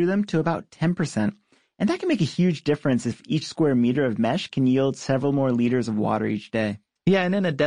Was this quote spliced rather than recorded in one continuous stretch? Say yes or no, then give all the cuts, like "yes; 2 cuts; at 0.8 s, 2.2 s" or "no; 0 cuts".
no; 0 cuts